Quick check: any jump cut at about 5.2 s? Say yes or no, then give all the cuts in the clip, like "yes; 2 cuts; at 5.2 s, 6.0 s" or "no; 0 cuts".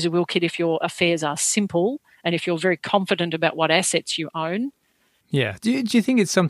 yes; 1 cut; at 5.2 s